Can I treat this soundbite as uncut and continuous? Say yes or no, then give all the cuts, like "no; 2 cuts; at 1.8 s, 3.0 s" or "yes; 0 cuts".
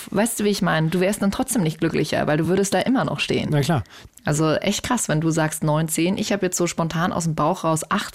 yes; 0 cuts